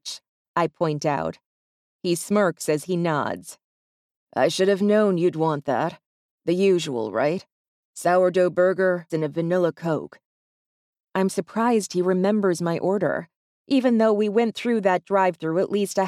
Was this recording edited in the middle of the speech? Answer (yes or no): yes